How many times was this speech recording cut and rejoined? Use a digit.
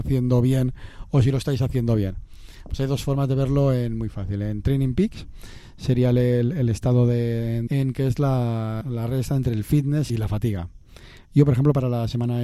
3